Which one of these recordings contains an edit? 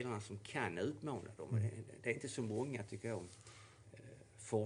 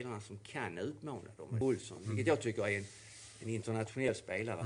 second; 1 cut; at 1.6 s

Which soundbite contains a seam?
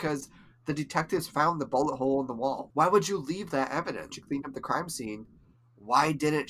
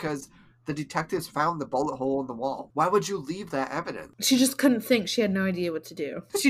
first; 1 cut; at 4.1 s

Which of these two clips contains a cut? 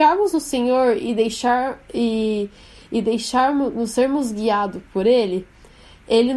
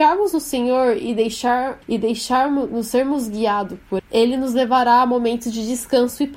second; 2 cuts; at 1.8 s, 4.0 s

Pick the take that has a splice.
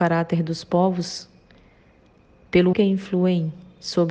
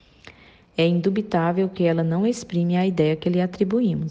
first; 1 cut; at 2.7 s

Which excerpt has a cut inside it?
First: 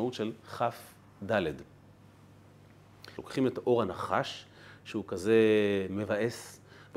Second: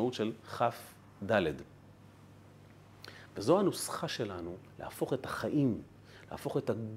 first; 1 cut; at 3.2 s

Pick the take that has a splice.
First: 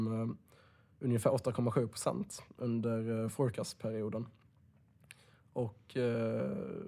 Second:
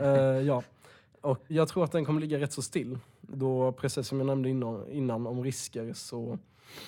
second; 1 cut; at 1.5 s

